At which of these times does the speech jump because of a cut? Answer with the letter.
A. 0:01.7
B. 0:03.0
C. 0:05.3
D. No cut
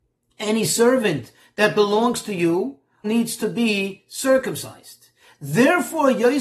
B